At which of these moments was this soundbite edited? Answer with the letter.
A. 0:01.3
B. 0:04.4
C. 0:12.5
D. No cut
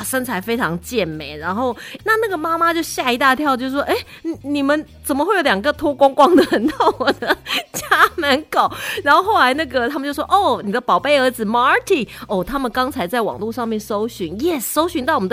B